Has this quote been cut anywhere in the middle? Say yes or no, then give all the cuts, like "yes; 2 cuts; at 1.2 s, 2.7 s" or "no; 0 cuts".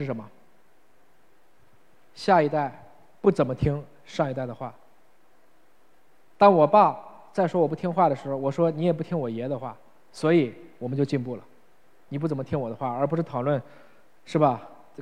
yes; 1 cut; at 12.1 s